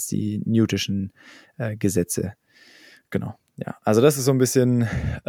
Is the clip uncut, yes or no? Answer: yes